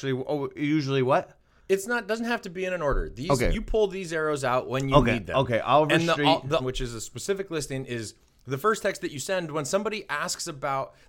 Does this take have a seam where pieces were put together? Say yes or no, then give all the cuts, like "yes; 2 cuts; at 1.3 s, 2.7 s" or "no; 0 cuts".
yes; 1 cut; at 6.6 s